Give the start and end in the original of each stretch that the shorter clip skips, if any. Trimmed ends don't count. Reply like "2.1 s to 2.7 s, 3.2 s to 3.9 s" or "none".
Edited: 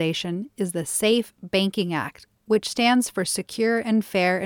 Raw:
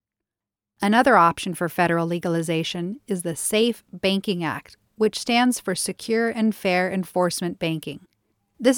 none